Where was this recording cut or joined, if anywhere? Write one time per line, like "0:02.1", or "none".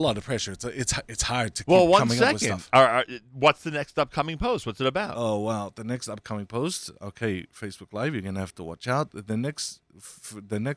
none